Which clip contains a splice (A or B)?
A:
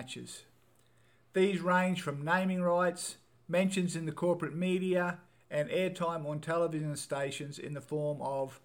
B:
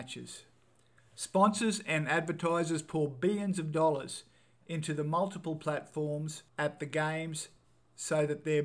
B